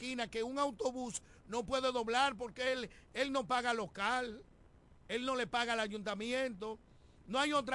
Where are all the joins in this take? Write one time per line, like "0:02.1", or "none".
none